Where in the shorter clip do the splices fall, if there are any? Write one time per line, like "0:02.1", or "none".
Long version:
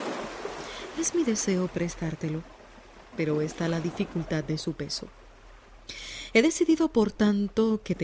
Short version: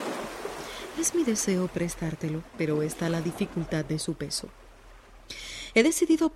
0:02.5